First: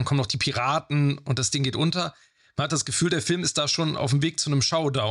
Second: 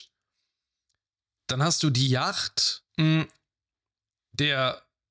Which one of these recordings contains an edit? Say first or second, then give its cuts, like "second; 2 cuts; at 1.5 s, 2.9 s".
second; 1 cut; at 2.9 s